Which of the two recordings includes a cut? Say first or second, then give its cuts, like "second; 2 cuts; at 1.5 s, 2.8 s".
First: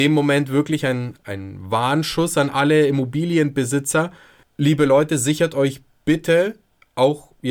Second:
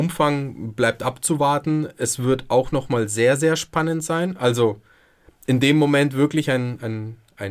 first; 1 cut; at 1.1 s